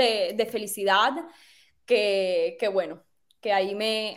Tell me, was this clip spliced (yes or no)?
no